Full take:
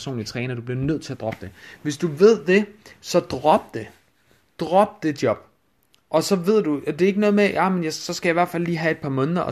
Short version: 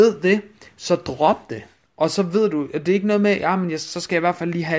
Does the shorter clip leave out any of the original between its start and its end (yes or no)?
yes